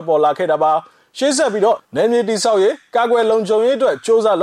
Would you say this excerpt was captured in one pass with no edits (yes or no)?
no